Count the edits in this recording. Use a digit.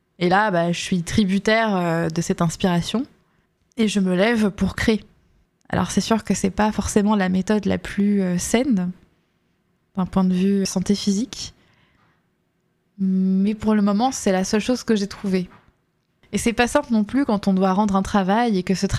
1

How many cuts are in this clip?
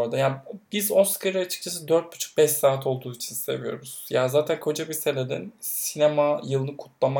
0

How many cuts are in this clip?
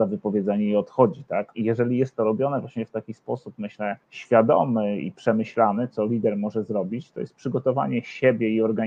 3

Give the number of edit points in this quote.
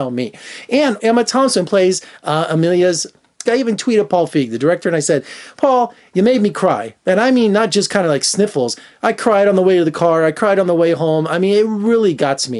2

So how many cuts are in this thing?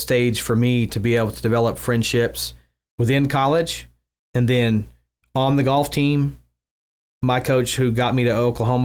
0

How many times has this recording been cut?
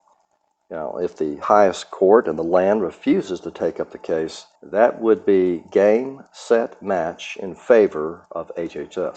1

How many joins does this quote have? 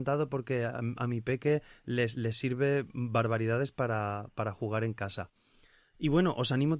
0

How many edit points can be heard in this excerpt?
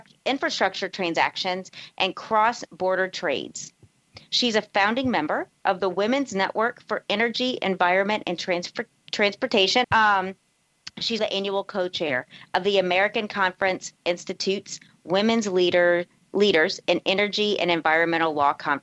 2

